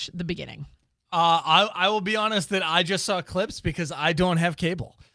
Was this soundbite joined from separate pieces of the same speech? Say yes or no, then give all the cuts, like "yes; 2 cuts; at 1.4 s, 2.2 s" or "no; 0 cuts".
no; 0 cuts